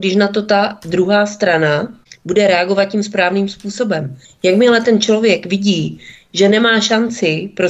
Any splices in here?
yes; 1 cut; at 4.2 s

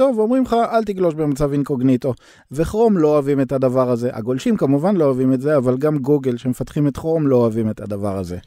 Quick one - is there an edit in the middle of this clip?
no; 0 cuts

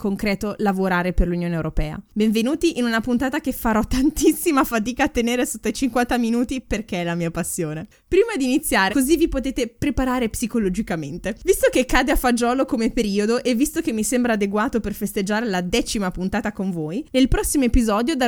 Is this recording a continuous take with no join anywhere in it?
no; 1 cut; at 8.9 s

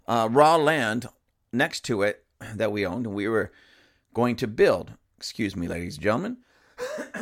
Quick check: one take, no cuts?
yes; 0 cuts

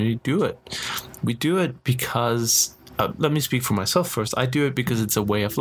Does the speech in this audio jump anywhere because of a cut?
yes; 1 cut; at 3.2 s

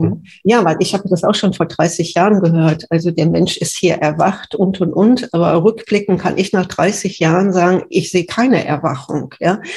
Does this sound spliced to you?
no; 0 cuts

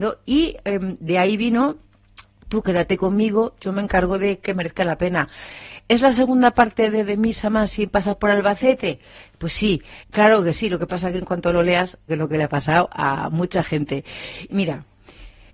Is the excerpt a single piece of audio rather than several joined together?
no; 3 cuts; at 10.0 s, 12.1 s, 14.5 s

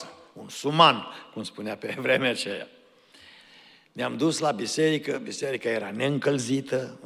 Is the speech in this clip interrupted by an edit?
no; 0 cuts

